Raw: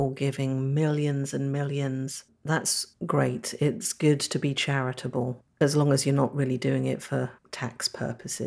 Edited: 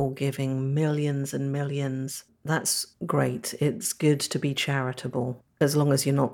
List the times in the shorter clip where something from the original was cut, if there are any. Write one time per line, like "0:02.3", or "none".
none